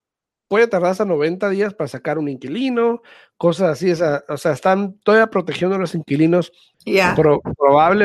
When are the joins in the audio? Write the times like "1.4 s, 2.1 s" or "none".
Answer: 6.7 s